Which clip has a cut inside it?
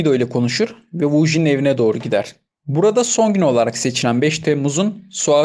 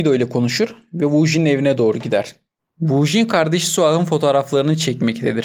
second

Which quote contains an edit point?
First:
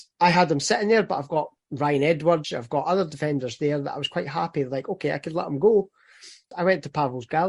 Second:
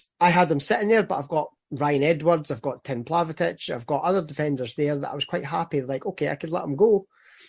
first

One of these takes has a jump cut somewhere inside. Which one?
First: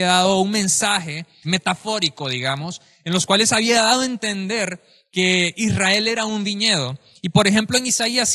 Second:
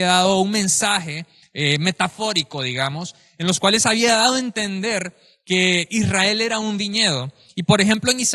first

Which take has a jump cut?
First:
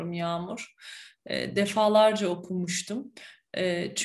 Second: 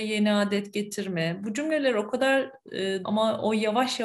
second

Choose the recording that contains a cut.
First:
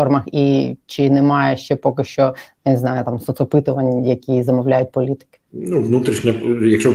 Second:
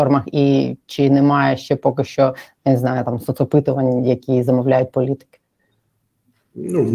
first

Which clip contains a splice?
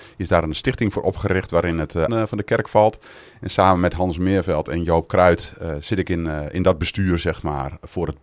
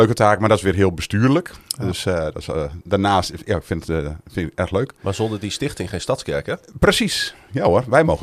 first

